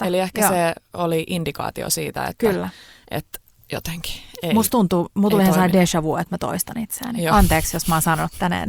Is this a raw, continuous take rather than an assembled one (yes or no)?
yes